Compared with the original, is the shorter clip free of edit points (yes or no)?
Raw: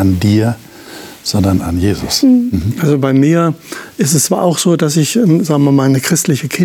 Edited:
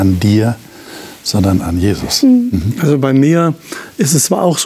yes